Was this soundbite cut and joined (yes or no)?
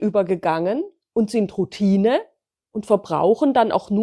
no